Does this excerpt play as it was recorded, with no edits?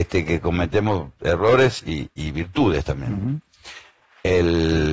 yes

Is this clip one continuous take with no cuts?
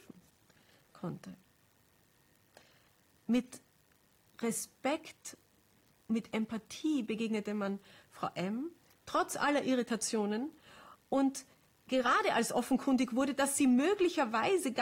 yes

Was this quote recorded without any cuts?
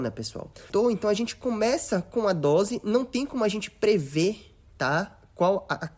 yes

